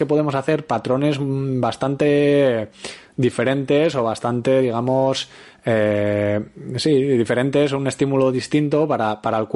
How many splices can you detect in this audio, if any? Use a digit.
0